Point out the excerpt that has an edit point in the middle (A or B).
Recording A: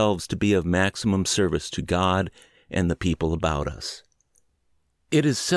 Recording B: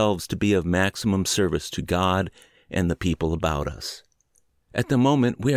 B